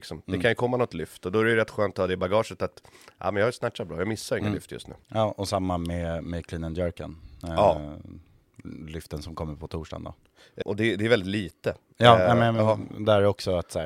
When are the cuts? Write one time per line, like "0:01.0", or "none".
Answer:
0:05.0
0:10.6